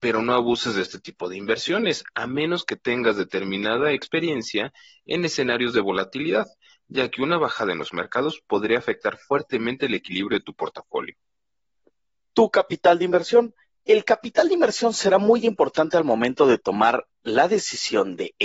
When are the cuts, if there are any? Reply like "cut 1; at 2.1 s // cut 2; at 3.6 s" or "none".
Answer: none